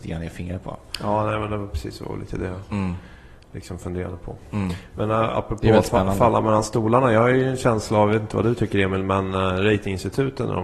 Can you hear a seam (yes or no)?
no